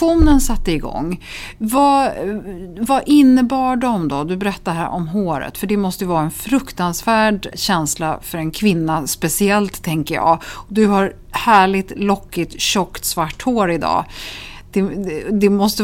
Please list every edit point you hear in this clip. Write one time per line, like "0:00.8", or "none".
0:07.5